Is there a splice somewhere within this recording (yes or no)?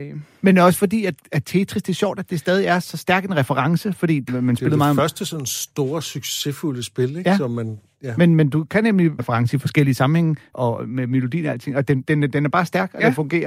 yes